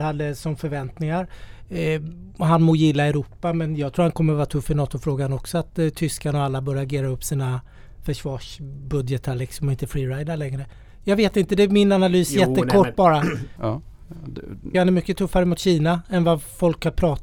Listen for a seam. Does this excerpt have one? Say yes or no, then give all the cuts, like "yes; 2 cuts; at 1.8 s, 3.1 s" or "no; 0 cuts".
yes; 2 cuts; at 13.6 s, 14.7 s